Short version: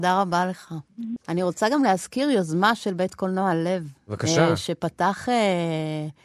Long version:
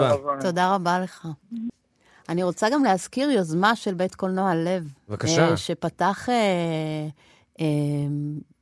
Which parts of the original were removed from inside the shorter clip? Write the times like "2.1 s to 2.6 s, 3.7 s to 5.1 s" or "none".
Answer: 1.7 s to 2.2 s